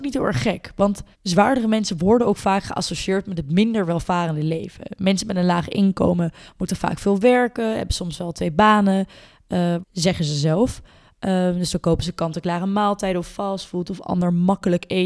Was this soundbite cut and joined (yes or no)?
yes